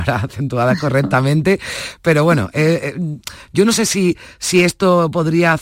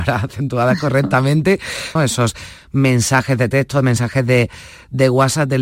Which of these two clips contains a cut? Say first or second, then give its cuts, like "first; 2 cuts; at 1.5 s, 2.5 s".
second; 1 cut; at 2.0 s